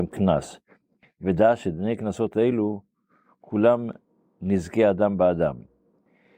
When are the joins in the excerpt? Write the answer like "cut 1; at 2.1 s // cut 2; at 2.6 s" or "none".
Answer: none